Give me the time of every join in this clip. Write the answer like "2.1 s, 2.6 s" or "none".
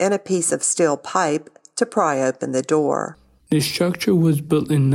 3.4 s